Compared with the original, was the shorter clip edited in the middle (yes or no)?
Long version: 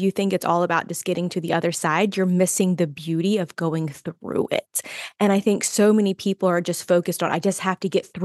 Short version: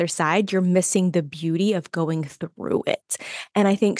no